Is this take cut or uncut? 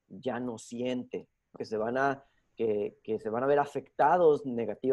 cut